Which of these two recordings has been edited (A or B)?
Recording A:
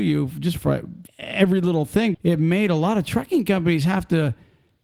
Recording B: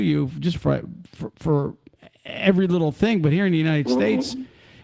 A